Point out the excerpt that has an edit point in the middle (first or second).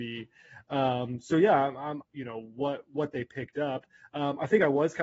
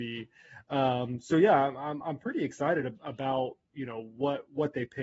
first